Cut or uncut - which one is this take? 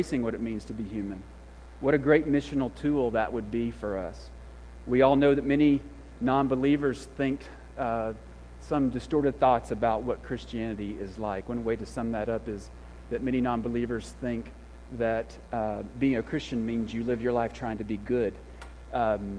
uncut